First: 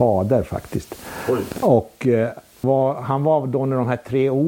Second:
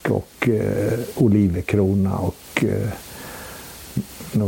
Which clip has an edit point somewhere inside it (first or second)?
first